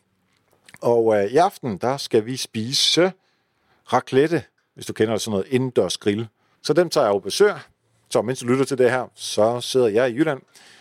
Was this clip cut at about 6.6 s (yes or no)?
yes